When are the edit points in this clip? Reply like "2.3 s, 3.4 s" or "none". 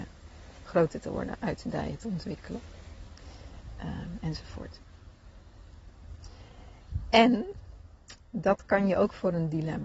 none